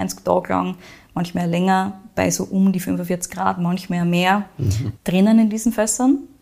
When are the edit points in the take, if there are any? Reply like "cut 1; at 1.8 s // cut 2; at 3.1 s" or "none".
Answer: none